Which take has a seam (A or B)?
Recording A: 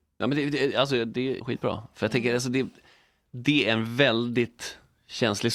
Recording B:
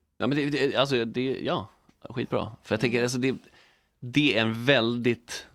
A